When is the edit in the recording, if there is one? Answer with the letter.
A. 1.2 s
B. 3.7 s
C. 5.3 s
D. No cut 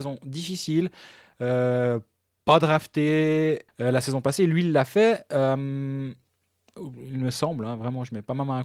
B